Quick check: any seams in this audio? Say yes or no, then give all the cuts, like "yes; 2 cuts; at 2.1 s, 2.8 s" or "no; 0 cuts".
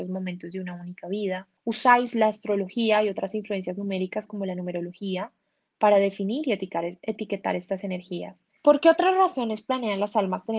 yes; 2 cuts; at 1.6 s, 8.6 s